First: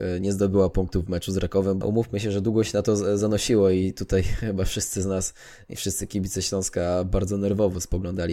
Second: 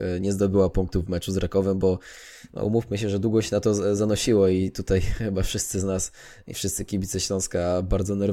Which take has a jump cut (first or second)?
first